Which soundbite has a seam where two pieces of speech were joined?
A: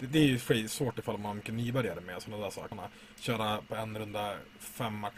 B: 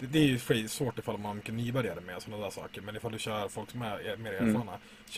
A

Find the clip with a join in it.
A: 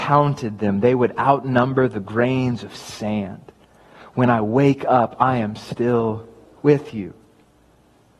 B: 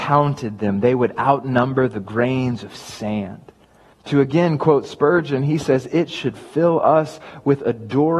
B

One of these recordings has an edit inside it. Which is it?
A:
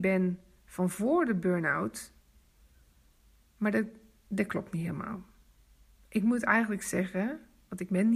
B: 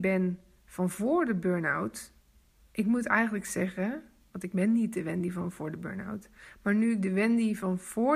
B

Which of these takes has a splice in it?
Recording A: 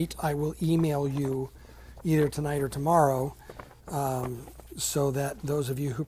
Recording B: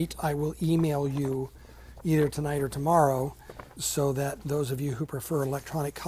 B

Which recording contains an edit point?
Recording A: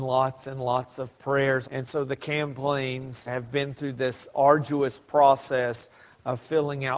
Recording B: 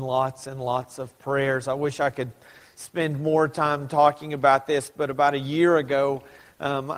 A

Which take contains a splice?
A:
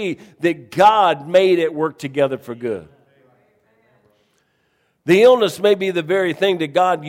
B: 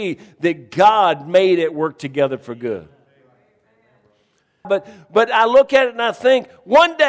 B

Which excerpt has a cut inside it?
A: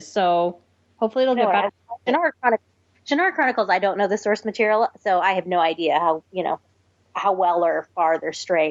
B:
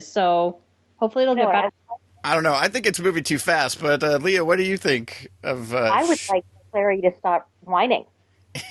A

